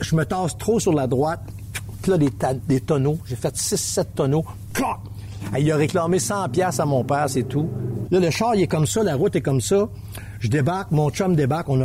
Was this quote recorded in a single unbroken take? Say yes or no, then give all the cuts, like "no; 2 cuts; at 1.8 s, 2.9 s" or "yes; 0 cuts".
no; 2 cuts; at 5.4 s, 8.0 s